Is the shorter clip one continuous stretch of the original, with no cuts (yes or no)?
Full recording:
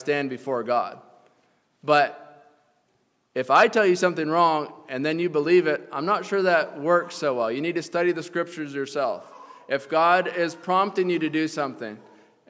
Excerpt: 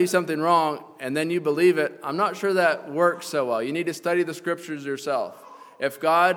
yes